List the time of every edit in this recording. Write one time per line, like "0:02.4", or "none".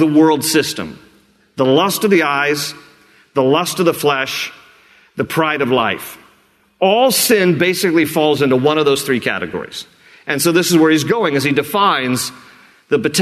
none